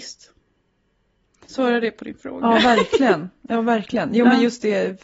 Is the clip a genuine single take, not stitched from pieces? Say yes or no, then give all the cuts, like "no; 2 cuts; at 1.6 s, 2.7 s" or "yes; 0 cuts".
yes; 0 cuts